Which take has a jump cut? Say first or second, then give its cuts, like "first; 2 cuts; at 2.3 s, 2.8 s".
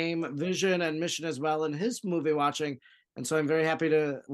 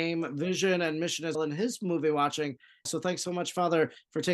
second; 2 cuts; at 1.3 s, 2.9 s